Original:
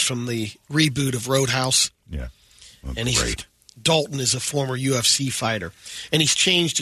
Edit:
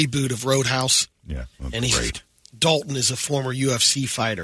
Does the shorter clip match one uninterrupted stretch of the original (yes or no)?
no